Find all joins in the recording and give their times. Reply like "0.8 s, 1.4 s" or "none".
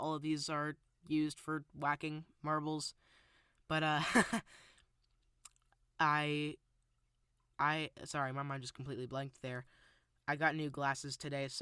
none